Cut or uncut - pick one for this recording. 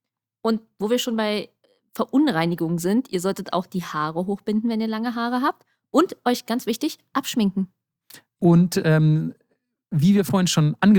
uncut